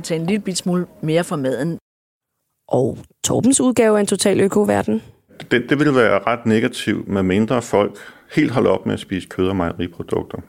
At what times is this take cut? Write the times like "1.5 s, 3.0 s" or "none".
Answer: 5.7 s